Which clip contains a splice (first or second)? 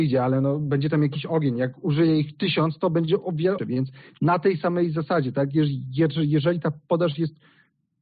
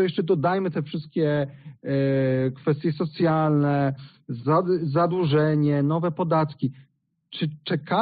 first